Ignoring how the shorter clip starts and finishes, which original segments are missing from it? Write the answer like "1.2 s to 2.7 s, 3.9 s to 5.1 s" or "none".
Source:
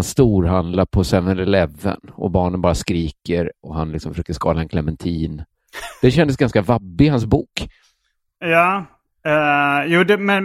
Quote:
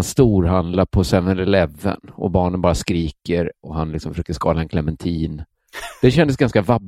none